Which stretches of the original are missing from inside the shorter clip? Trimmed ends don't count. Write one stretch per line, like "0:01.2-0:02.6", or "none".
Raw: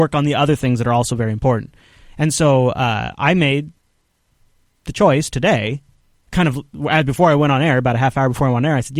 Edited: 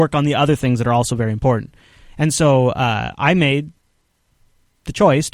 none